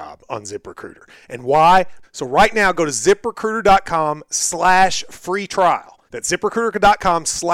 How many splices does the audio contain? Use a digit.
2